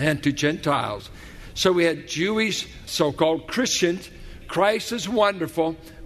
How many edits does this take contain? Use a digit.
2